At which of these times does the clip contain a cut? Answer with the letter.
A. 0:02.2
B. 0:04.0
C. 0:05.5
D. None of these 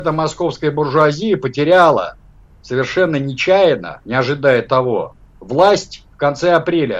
B